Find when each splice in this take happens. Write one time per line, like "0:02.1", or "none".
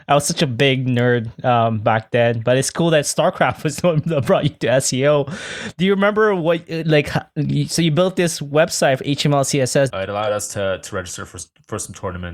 0:09.9